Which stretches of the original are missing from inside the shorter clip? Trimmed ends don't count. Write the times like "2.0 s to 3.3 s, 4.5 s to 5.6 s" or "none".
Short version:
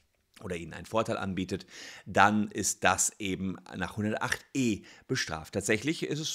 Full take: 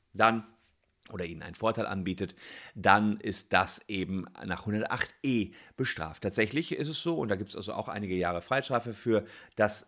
none